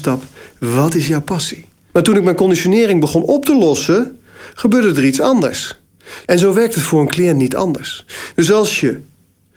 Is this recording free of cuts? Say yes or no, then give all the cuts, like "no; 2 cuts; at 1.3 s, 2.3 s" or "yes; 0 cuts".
no; 2 cuts; at 1.9 s, 6.3 s